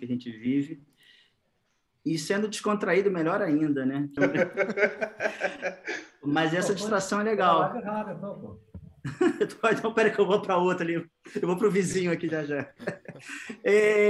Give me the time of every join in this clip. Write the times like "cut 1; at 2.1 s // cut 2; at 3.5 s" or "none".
cut 1; at 4.2 s

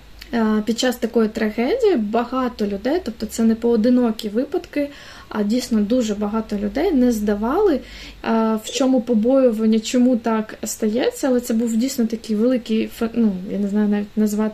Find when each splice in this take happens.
cut 1; at 8.2 s

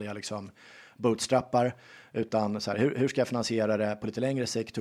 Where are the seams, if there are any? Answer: none

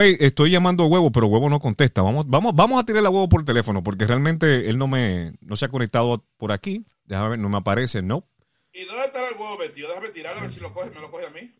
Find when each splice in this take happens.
none

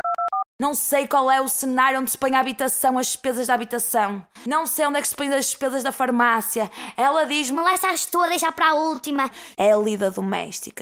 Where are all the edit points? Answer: cut 1; at 9.5 s

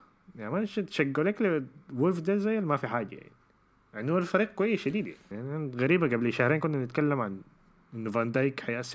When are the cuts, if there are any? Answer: cut 1; at 5.3 s

